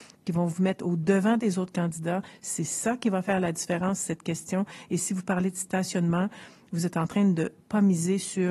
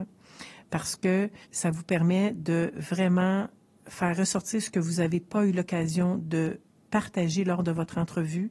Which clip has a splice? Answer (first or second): second